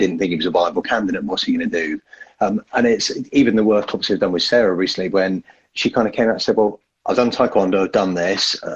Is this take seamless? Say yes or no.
yes